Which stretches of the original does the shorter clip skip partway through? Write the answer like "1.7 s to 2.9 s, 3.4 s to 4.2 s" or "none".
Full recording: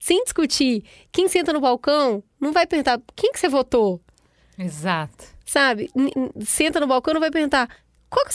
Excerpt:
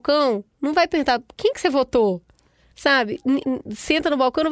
4.5 s to 5.4 s